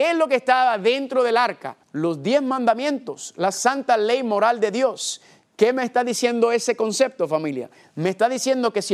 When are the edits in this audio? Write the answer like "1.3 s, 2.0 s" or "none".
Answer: 1.8 s